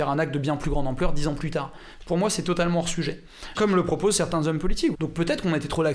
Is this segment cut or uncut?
cut